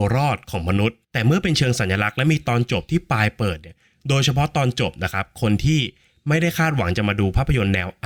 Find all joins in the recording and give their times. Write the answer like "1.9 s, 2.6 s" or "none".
1.0 s